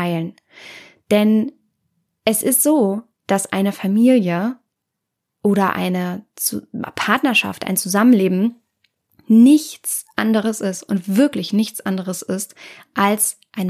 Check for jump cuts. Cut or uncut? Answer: uncut